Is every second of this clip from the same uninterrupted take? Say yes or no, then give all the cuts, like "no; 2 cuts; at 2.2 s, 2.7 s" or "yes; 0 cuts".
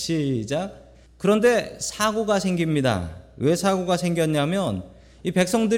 no; 1 cut; at 1.1 s